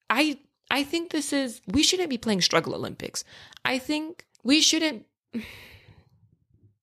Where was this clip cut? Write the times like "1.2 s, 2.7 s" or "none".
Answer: 1.6 s, 4.3 s